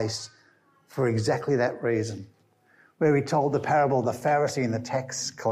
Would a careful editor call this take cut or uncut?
uncut